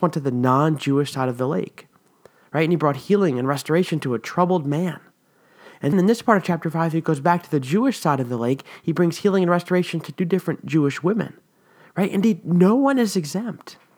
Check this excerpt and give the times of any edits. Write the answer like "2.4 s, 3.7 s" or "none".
5.9 s